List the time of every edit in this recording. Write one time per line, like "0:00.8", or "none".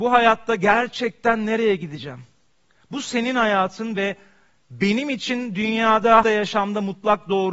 0:06.2